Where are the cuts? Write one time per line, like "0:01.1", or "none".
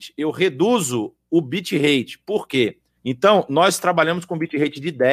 0:03.0